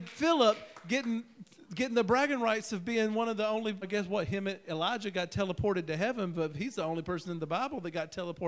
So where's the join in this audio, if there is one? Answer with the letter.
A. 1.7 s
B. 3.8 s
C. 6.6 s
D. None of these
B